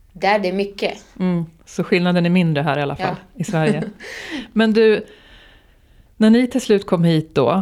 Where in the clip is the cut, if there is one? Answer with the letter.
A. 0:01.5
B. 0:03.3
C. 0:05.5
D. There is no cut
D